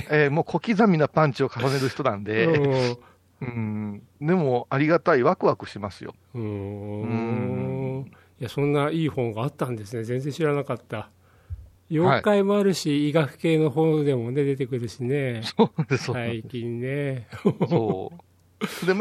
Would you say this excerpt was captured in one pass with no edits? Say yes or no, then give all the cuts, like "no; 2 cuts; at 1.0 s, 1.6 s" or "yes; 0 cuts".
no; 1 cut; at 11.8 s